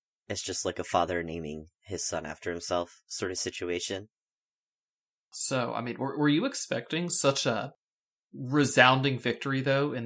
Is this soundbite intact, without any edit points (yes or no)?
yes